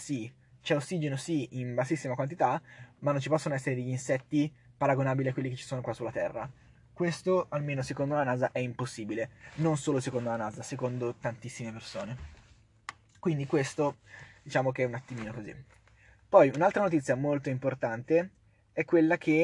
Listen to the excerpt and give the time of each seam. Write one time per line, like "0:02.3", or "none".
none